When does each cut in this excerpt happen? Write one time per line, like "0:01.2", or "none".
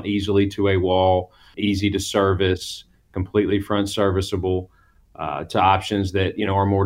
0:01.5

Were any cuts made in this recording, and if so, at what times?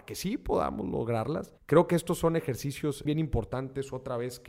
0:01.6
0:03.1

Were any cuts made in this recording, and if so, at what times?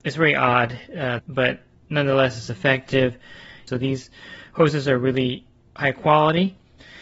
0:01.2
0:03.7

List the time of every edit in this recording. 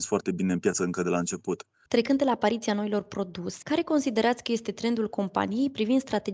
0:01.9
0:03.6

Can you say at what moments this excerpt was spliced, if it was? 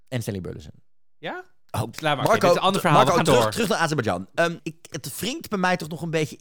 0:01.9
0:04.6

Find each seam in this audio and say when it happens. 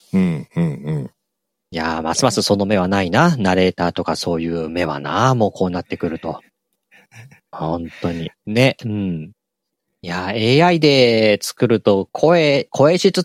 0:08.4

